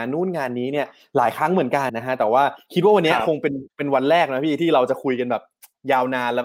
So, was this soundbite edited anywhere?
yes; 1 cut; at 1.9 s

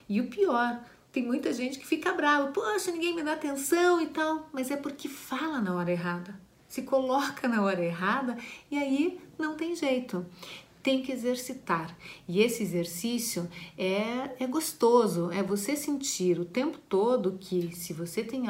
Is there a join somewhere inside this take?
no; 0 cuts

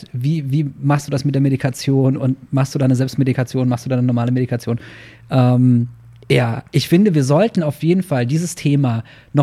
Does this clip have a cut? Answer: no; 0 cuts

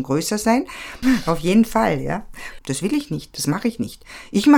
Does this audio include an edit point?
yes; 2 cuts; at 1.0 s, 2.6 s

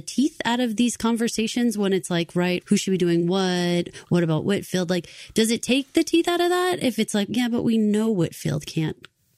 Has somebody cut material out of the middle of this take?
yes; 1 cut; at 2.6 s

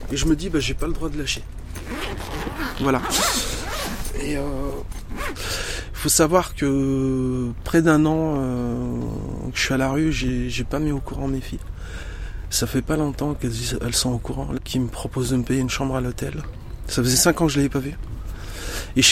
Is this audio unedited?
no; 2 cuts; at 14.6 s, 16.8 s

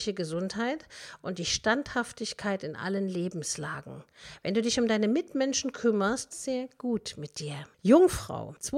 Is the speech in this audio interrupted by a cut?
yes; 1 cut; at 6.3 s

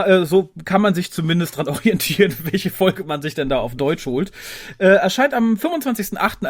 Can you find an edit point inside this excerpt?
no; 0 cuts

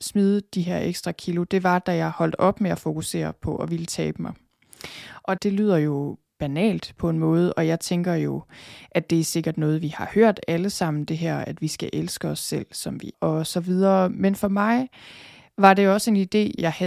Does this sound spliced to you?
yes; 1 cut; at 13.1 s

